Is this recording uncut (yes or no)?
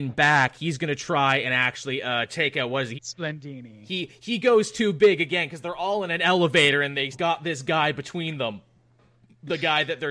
no